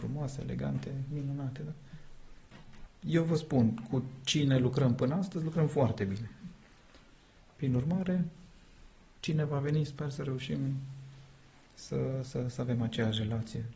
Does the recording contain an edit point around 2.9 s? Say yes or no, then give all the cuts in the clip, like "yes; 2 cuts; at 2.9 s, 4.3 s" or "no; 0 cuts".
yes; 1 cut; at 2.9 s